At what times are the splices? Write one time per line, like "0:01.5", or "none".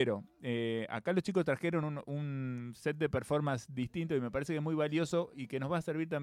none